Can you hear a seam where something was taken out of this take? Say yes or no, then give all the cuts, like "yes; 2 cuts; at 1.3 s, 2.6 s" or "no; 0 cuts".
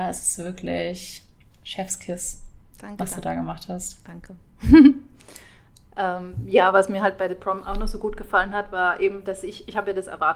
no; 0 cuts